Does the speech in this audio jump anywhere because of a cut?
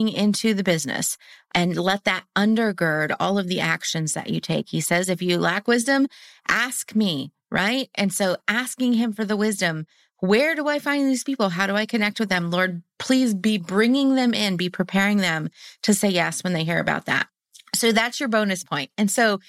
no; 0 cuts

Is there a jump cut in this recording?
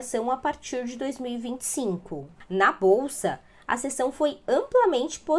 yes; 1 cut; at 2.5 s

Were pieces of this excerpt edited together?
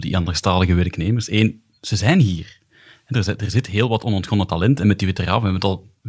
no; 0 cuts

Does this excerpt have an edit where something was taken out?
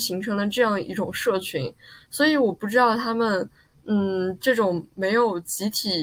no; 0 cuts

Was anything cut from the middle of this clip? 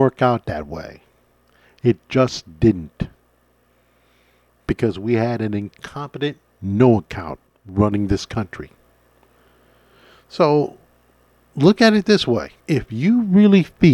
no; 0 cuts

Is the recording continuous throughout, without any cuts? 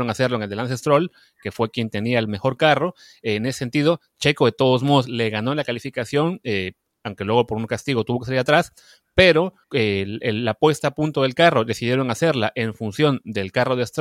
no; 1 cut; at 9.6 s

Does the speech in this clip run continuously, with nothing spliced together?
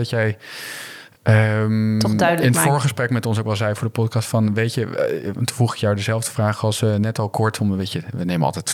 yes; 0 cuts

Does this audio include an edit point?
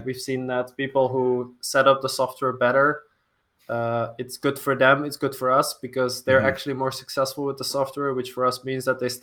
no; 0 cuts

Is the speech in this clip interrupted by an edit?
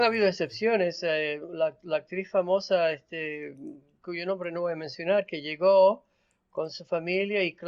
no; 0 cuts

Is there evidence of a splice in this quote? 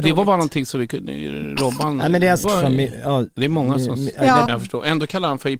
yes; 2 cuts; at 2.4 s, 4.5 s

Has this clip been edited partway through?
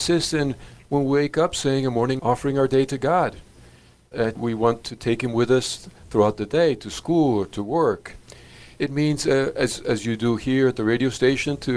yes; 2 cuts; at 2.2 s, 4.4 s

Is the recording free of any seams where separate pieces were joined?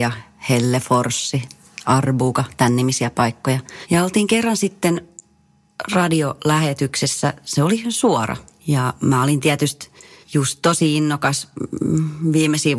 yes; 0 cuts

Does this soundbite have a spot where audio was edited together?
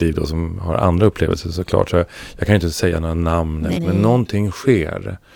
yes; 1 cut; at 3.7 s

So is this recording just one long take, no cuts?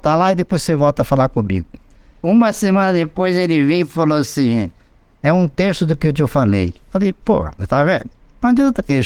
yes; 0 cuts

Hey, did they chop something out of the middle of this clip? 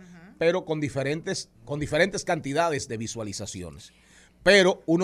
yes; 1 cut; at 1.6 s

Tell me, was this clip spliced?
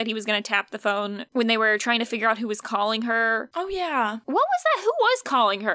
no; 0 cuts

